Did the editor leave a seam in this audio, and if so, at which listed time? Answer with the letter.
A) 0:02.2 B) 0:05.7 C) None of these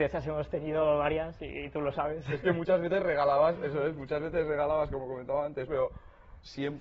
B